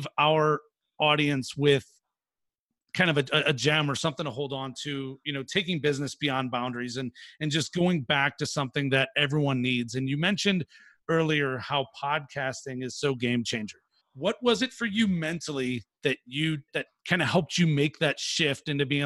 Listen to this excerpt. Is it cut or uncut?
cut